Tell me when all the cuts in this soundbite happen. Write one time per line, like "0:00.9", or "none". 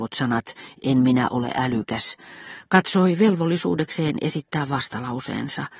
none